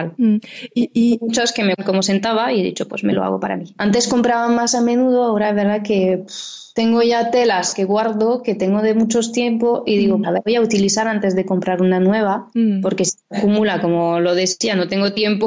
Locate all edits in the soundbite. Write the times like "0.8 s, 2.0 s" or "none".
3.8 s, 10.2 s